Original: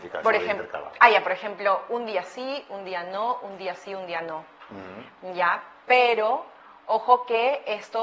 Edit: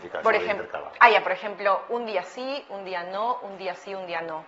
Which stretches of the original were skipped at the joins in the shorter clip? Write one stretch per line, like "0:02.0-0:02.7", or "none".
none